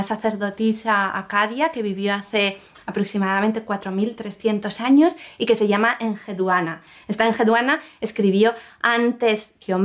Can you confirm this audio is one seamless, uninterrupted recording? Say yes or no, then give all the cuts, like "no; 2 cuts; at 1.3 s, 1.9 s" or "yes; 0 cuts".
yes; 0 cuts